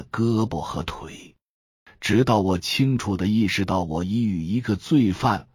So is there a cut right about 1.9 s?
yes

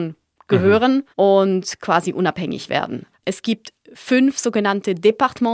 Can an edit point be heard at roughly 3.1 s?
yes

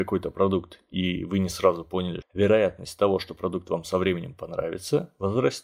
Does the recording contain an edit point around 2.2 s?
yes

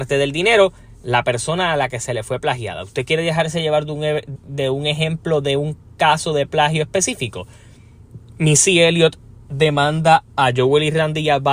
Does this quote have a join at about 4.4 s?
yes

